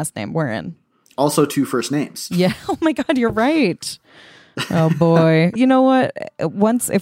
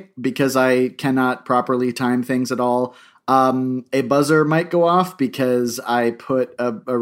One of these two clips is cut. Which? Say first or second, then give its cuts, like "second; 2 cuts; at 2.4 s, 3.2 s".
first; 1 cut; at 5.6 s